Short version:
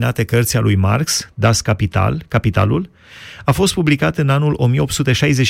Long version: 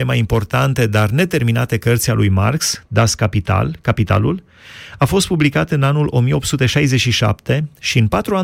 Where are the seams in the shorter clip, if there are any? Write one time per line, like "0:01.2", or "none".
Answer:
none